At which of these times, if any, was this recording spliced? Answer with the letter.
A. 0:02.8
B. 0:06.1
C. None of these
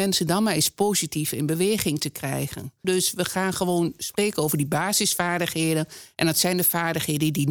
A